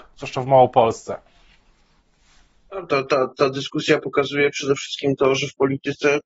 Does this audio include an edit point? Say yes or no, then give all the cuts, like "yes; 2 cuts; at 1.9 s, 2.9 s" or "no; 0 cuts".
no; 0 cuts